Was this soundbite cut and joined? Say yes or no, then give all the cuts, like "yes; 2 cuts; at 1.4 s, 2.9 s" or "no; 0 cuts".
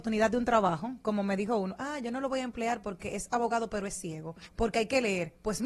yes; 1 cut; at 4.4 s